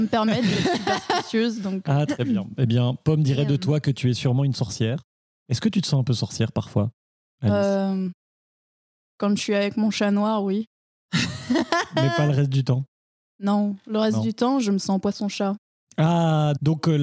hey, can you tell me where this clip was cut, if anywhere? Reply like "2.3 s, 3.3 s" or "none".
none